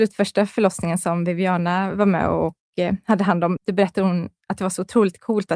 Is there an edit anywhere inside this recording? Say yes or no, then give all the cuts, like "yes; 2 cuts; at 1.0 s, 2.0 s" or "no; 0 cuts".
yes; 1 cut; at 3.6 s